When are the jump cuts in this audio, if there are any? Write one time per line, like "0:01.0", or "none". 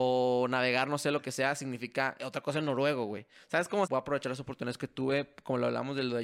0:02.2
0:03.8